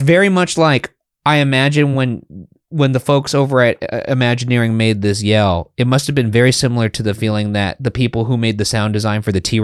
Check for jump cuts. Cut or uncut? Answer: uncut